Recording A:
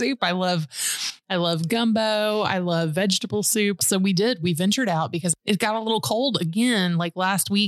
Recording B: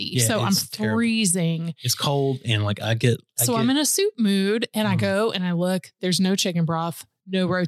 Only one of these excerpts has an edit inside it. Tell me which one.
A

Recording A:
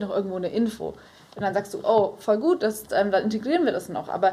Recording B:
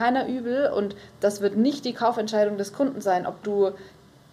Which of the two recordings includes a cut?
A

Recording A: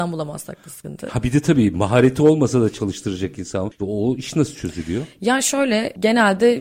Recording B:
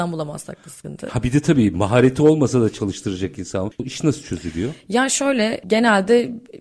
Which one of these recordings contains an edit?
B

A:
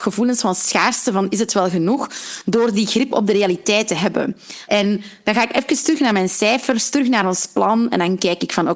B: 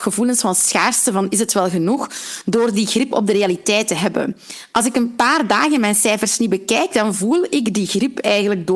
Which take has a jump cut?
A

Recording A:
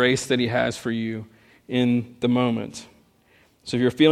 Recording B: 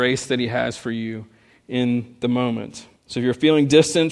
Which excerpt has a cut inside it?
B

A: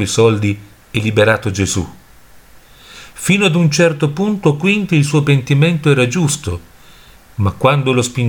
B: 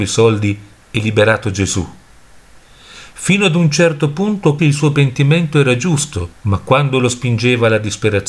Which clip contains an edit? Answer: B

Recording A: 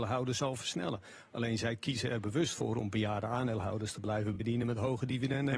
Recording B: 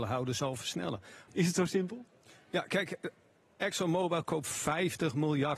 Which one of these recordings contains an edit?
B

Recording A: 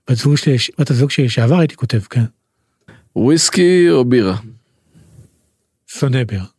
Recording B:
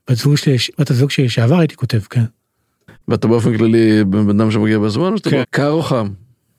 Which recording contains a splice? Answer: B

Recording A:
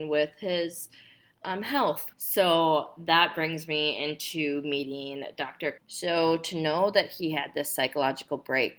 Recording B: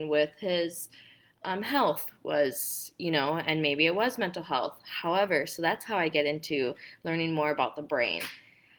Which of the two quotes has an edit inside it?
A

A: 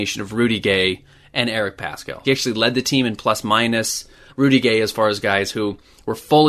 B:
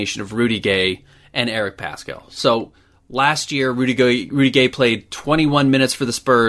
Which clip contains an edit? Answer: A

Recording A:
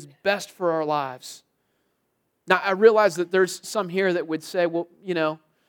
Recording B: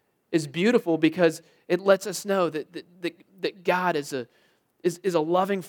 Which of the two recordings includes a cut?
A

